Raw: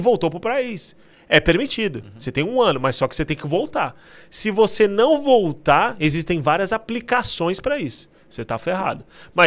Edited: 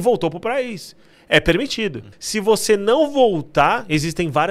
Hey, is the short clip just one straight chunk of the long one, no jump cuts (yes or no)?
no